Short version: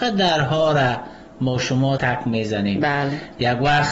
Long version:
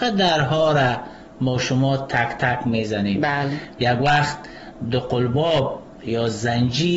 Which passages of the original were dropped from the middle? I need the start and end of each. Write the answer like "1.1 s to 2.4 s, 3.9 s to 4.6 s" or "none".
2.0 s to 2.4 s